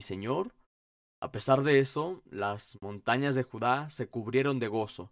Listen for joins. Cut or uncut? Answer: cut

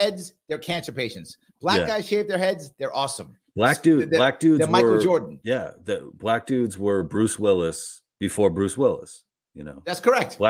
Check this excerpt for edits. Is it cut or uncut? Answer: uncut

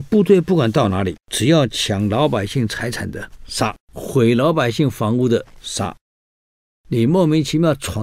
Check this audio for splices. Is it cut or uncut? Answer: cut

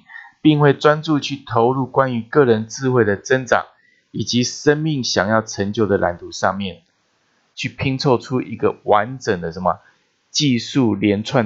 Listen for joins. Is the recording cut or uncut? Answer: cut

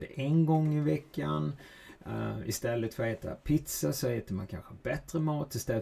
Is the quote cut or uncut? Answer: uncut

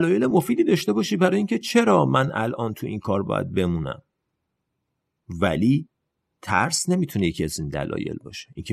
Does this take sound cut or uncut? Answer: uncut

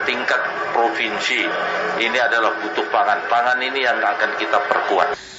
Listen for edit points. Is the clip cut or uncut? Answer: uncut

